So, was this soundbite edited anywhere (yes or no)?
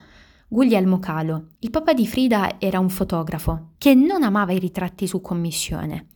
yes